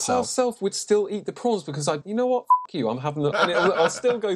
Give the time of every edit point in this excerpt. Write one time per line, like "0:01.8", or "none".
0:02.0
0:03.3